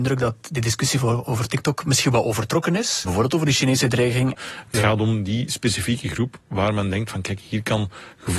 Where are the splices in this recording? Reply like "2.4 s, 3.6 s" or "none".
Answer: 3.0 s, 4.3 s